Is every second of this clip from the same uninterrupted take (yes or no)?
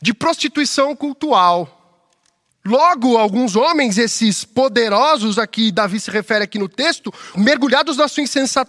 no